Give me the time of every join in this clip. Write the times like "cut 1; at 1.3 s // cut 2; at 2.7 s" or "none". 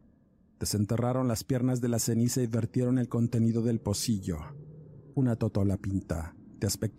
cut 1; at 5.1 s